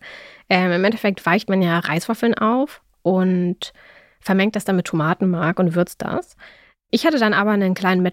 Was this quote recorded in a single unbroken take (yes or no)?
yes